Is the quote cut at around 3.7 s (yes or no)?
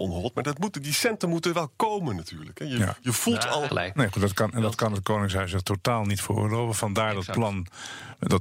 yes